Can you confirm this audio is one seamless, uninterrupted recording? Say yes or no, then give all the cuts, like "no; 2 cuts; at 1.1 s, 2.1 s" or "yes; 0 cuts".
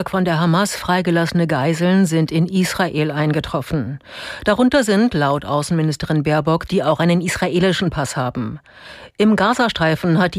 no; 1 cut; at 6.7 s